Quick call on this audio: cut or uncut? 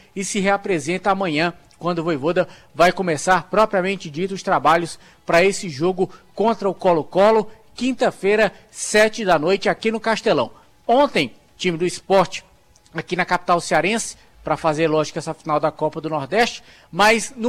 uncut